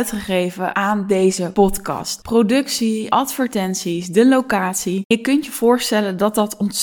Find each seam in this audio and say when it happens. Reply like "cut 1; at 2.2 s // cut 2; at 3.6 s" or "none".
none